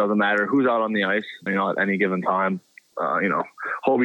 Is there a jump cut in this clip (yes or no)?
yes